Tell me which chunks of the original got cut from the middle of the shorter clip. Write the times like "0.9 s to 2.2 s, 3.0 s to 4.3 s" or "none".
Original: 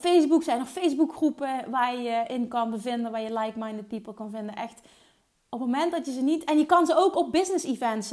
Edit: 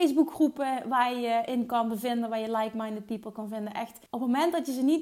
4.9 s to 5.5 s